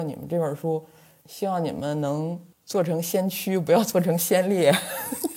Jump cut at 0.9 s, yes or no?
no